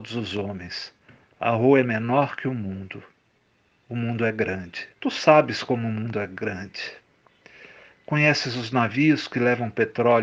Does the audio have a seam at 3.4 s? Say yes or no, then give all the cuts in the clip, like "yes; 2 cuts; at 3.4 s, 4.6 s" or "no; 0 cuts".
no; 1 cut; at 4.9 s